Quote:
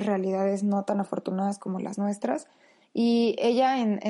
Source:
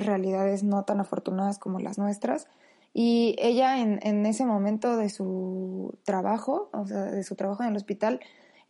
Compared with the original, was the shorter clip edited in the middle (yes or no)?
no